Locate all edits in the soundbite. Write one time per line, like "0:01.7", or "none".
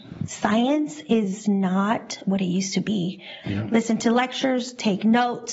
0:03.4